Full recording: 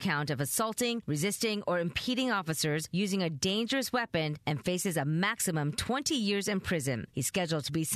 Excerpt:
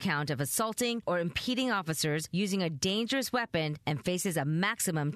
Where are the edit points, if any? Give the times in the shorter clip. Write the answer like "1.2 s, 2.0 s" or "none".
1.0 s